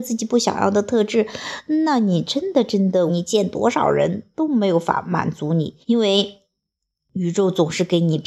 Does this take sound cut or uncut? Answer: cut